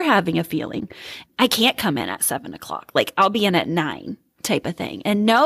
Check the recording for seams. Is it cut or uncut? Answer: cut